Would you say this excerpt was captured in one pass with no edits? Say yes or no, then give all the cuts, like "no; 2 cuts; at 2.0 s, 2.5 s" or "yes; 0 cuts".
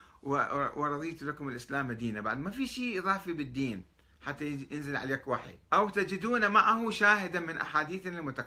no; 1 cut; at 5.7 s